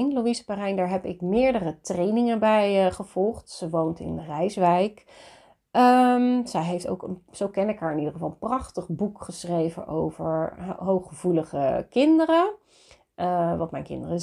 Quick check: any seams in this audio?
no; 0 cuts

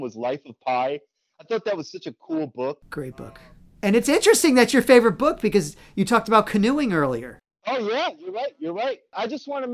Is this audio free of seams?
yes; 0 cuts

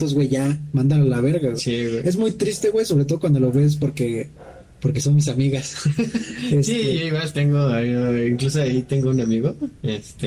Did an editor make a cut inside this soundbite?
no; 0 cuts

